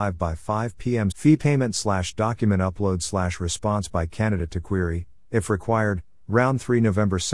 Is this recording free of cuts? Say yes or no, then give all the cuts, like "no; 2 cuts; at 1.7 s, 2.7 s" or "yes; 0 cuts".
no; 1 cut; at 1.1 s